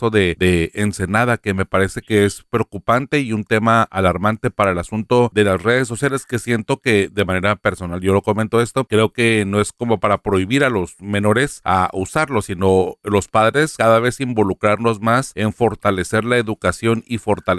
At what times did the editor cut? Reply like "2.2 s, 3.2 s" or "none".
none